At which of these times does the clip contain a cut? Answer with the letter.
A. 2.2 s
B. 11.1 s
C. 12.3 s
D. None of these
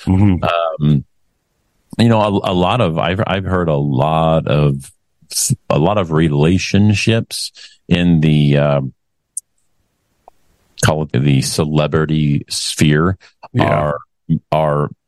B